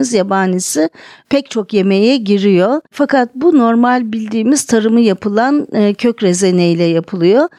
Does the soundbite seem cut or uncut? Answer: cut